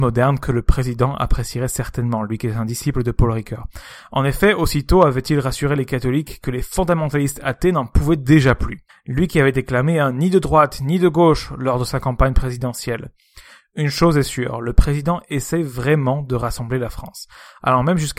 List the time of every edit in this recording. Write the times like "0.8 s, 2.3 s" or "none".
8.9 s